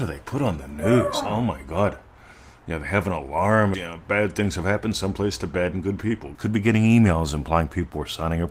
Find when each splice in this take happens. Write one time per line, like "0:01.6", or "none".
0:03.7
0:06.3